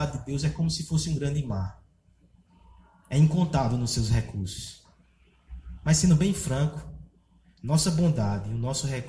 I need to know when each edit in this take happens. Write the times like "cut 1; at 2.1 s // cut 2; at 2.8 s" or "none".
none